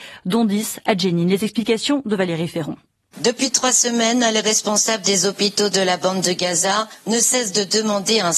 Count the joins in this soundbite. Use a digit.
0